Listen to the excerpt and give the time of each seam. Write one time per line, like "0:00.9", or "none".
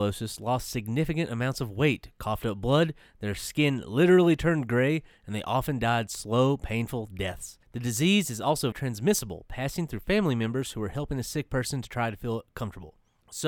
0:07.6
0:08.7

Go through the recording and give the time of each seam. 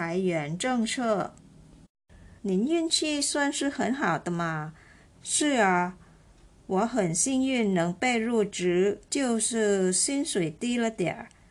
0:02.4
0:05.1
0:09.0

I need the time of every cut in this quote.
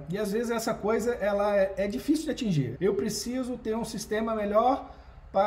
0:02.7

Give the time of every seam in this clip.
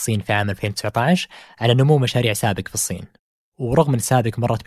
none

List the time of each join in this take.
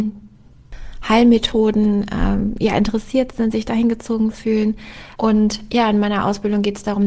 0:05.2

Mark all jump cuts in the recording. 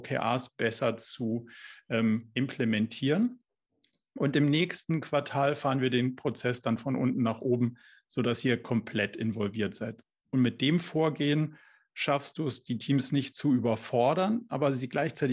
none

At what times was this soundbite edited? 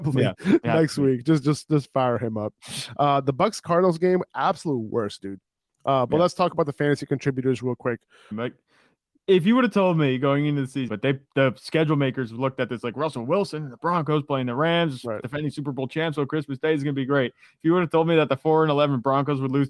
0:08.3
0:10.9

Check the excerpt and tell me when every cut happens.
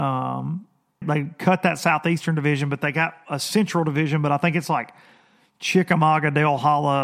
0:01.0

